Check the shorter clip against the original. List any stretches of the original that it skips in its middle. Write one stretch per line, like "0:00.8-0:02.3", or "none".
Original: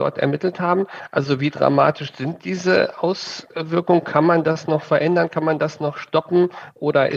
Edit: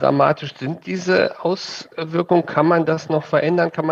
none